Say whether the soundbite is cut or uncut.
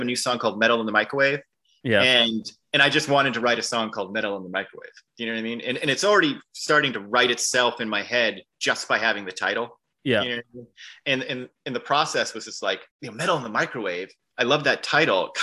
cut